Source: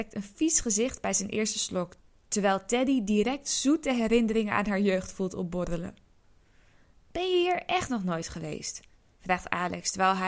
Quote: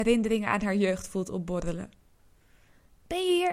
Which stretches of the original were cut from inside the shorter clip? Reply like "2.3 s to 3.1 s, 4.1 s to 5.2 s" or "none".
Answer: none